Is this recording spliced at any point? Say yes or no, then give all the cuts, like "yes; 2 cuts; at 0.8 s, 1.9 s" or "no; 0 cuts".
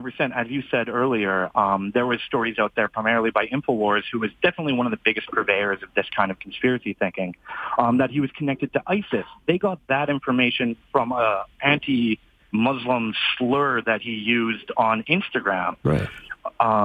no; 0 cuts